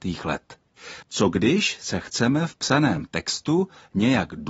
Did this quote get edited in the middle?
yes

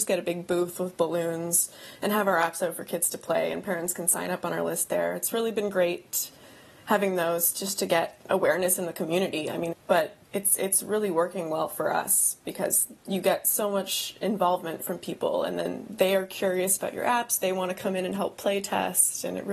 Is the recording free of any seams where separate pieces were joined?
no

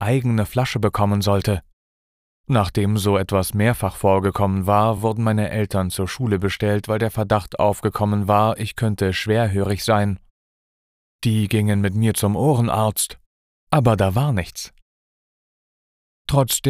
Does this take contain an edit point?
no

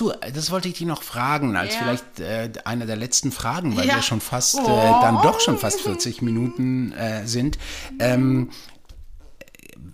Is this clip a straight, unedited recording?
yes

